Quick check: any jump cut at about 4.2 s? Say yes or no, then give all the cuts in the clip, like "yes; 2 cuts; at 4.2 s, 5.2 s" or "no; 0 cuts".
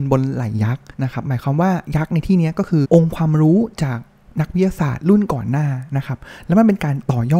no; 2 cuts; at 0.9 s, 2.8 s